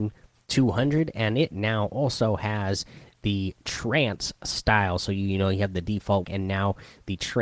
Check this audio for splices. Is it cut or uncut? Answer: cut